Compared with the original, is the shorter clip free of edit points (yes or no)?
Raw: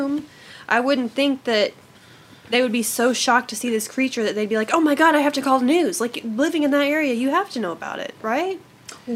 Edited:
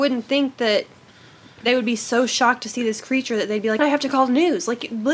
no